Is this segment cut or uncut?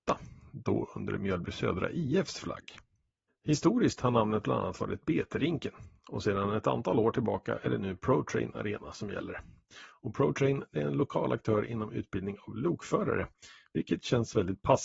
cut